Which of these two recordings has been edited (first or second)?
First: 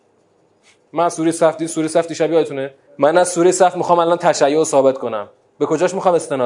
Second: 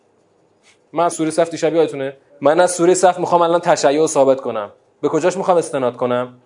second